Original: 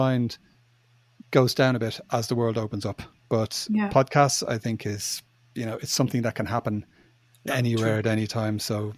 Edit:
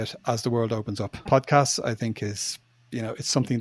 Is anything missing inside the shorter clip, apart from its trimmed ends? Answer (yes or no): yes